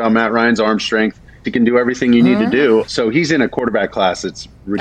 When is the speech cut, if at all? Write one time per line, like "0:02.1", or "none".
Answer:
0:01.4
0:02.9